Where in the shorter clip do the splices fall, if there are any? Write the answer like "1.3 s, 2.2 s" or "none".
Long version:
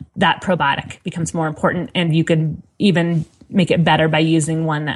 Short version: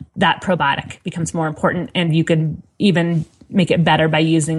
none